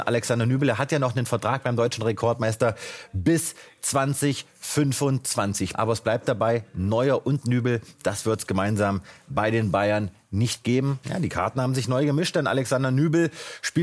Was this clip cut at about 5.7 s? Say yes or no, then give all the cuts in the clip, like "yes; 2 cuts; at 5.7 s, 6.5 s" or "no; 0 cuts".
yes; 2 cuts; at 5.7 s, 11.0 s